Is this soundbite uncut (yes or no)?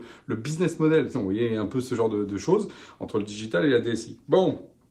no